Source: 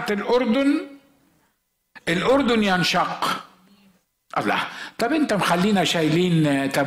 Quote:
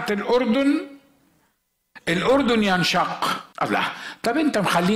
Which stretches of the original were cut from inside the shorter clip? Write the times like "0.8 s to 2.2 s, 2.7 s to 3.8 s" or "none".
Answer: 3.5 s to 4.3 s